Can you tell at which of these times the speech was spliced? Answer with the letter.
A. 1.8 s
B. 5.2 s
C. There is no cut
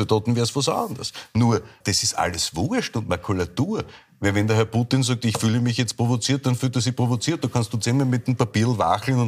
A